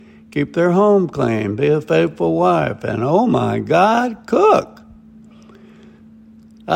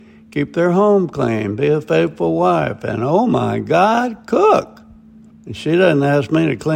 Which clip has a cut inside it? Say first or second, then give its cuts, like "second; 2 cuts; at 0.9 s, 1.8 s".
second; 1 cut; at 5.3 s